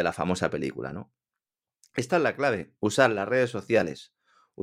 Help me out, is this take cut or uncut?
cut